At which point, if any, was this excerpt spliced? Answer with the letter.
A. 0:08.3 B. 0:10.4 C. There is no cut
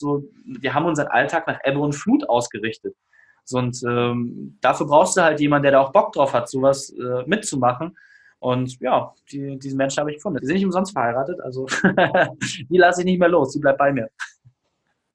B